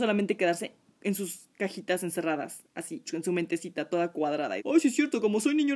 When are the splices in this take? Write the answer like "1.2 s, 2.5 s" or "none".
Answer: 3.0 s, 4.6 s